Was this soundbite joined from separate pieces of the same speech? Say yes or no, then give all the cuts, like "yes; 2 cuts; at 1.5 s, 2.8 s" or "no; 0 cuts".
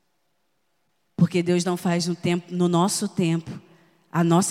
no; 0 cuts